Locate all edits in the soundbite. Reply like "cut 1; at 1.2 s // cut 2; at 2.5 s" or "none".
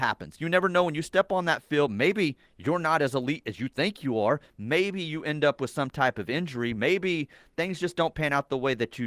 none